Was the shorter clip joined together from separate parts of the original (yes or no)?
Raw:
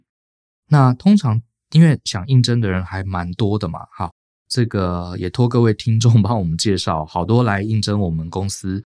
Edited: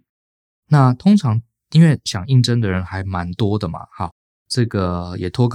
no